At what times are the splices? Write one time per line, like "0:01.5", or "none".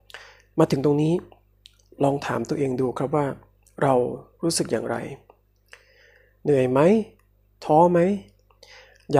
none